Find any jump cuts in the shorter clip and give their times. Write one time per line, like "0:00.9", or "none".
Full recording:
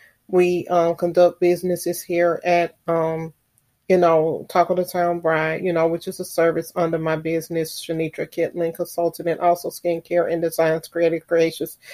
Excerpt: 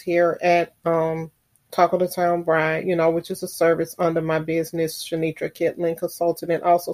0:01.7